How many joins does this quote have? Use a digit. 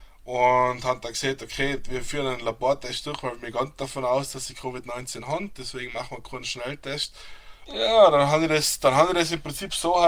1